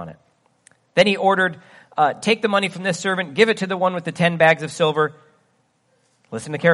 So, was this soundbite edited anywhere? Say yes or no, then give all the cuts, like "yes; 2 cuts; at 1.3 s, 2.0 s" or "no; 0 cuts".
no; 0 cuts